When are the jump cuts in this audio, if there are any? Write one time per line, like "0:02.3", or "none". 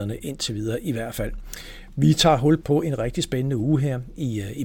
0:02.6